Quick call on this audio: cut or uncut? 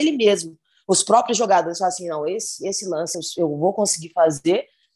uncut